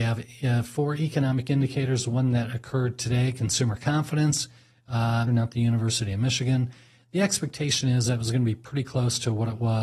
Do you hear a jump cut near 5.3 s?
yes; 1 cut; at 5.3 s

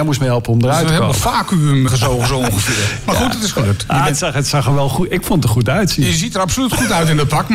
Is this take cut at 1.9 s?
yes; 1 cut; at 1.9 s

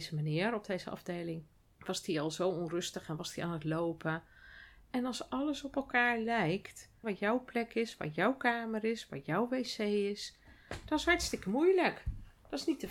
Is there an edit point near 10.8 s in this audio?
no; 1 cut; at 7.0 s

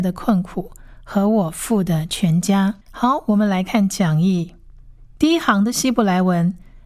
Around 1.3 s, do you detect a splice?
no; 2 cuts; at 2.8 s, 5.2 s

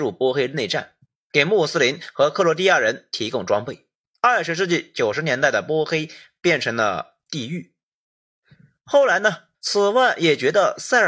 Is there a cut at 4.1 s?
yes; 2 cuts; at 4.1 s, 9.5 s

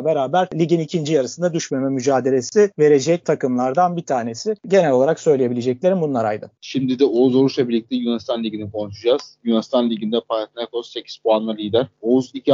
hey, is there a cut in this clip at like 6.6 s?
yes; 1 cut; at 6.6 s

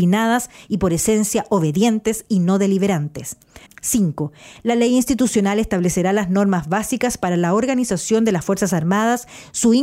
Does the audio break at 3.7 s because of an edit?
yes; 1 cut; at 3.7 s

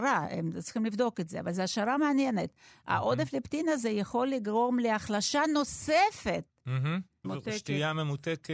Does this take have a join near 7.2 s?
yes; 1 cut; at 7.2 s

